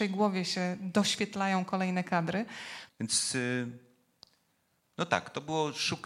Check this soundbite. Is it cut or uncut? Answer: cut